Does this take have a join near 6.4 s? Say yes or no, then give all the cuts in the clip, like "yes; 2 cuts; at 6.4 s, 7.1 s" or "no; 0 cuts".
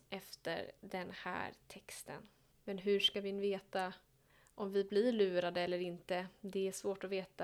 no; 1 cut; at 2.5 s